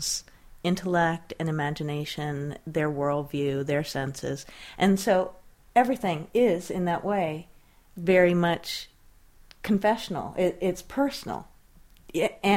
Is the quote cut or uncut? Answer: uncut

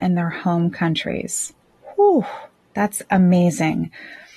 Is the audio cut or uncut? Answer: uncut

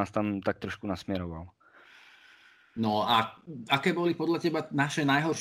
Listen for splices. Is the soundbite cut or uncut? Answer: uncut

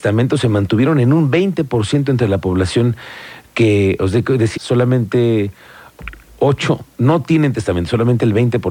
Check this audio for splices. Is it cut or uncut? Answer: cut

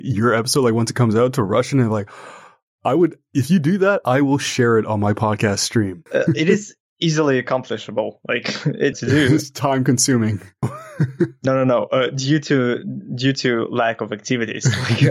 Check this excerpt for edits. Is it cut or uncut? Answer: cut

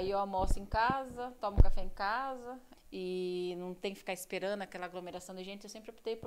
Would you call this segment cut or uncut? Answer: cut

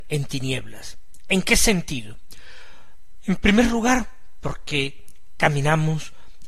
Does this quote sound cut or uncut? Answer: uncut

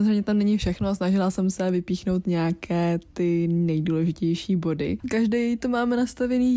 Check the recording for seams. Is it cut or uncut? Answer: cut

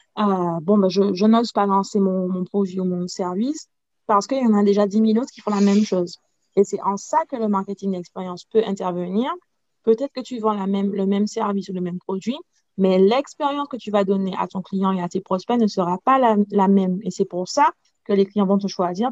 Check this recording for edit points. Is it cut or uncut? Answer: uncut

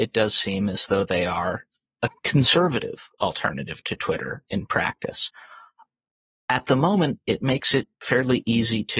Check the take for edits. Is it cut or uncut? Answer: uncut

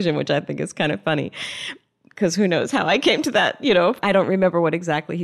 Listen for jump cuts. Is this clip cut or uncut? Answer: uncut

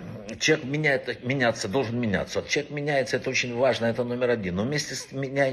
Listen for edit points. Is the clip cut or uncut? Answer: uncut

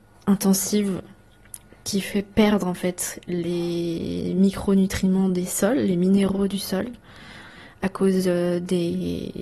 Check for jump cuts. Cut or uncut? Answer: uncut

